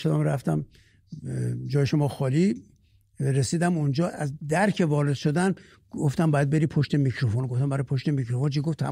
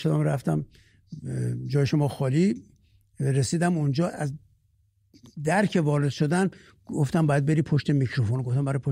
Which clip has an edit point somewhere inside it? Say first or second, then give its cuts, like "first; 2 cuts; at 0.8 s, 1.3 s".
first; 1 cut; at 4.4 s